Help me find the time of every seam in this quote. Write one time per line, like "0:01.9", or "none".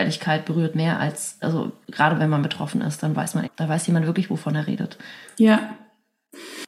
0:03.4